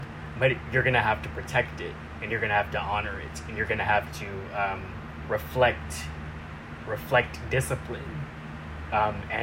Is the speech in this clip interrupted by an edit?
no; 0 cuts

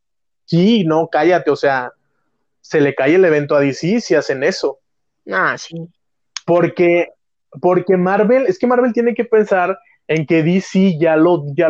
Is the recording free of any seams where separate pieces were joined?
yes; 0 cuts

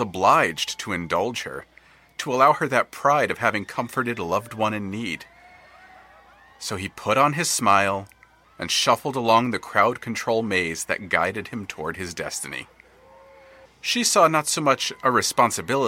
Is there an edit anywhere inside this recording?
yes; 2 cuts; at 8.4 s, 13.7 s

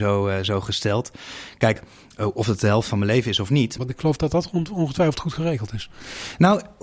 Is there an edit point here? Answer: yes; 1 cut; at 3.8 s

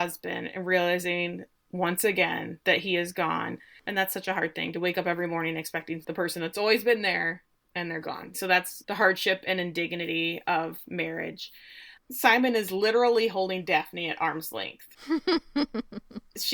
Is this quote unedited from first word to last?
no; 2 cuts; at 8.3 s, 12.0 s

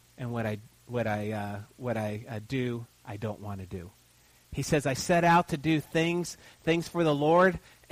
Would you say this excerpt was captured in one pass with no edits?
yes; 0 cuts

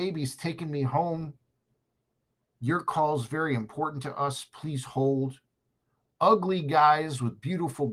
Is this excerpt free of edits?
yes; 0 cuts

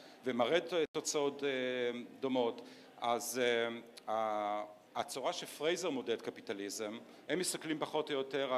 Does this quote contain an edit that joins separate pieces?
yes; 2 cuts; at 4.8 s, 7.2 s

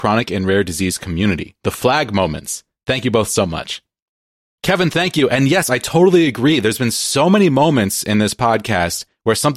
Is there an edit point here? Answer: no; 0 cuts

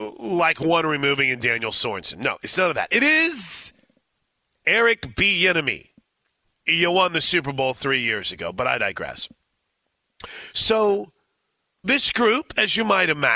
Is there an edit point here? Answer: yes; 1 cut; at 6.4 s

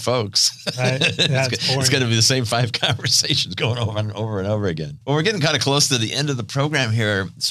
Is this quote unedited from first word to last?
no; 1 cut; at 5.0 s

